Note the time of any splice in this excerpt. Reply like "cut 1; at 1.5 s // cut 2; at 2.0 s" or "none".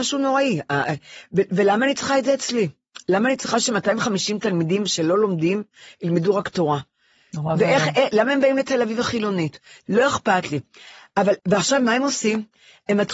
cut 1; at 9.9 s // cut 2; at 11.4 s